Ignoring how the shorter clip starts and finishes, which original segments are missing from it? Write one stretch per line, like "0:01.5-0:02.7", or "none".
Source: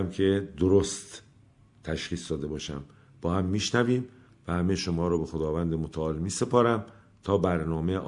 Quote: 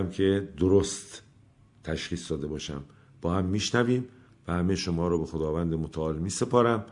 none

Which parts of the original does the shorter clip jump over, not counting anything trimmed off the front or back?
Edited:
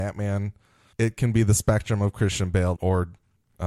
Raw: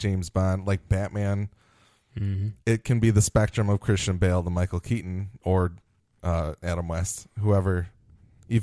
0:01.9-0:02.6
0:04.4-0:05.4

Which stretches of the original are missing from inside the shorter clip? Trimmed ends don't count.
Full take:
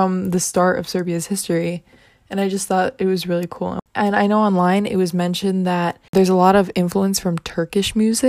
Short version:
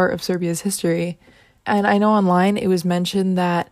0:02.2-0:03.9

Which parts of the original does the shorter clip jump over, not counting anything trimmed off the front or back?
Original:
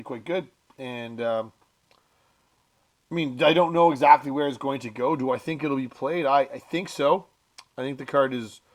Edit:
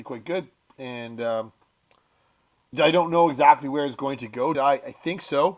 0:02.7-0:03.4
0:05.2-0:06.2

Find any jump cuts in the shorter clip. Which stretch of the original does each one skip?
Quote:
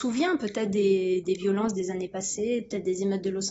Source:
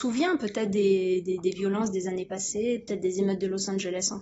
0:01.2-0:01.4

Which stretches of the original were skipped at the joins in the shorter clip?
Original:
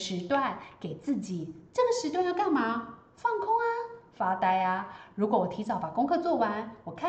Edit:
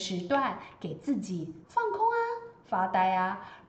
0:01.6-0:03.1

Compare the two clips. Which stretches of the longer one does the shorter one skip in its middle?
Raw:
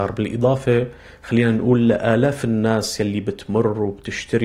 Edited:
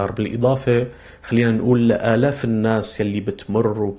none

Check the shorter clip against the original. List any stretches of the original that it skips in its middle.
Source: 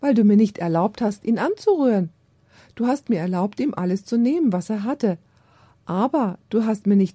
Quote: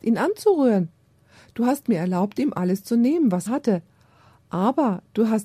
0:04.7-0:04.8

